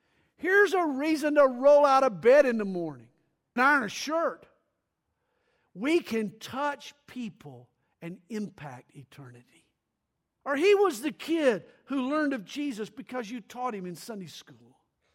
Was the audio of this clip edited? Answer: yes; 2 cuts; at 3.6 s, 10.4 s

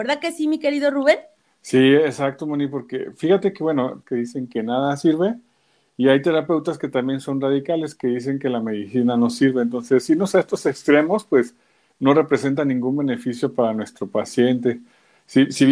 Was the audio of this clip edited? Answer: yes; 1 cut; at 4.0 s

